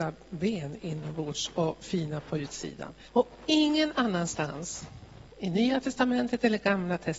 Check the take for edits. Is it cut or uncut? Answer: cut